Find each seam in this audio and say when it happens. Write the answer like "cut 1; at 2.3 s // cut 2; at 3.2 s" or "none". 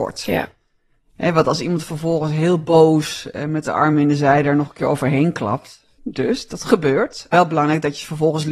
cut 1; at 6.0 s // cut 2; at 7.3 s